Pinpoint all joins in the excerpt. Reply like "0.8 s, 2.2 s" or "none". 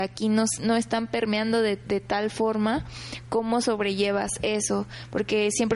none